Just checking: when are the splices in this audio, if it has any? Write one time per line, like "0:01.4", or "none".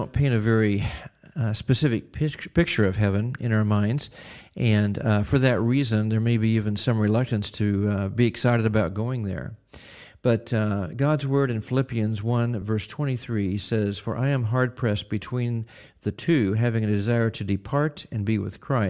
none